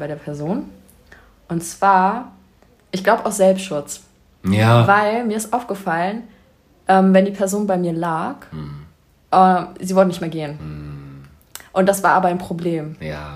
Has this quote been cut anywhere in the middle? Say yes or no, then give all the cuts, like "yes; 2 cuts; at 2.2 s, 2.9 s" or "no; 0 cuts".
yes; 1 cut; at 2.8 s